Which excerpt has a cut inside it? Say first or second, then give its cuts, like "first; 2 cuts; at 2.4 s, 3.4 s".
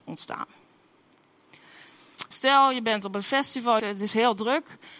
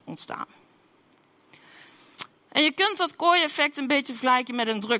first; 2 cuts; at 2.3 s, 3.8 s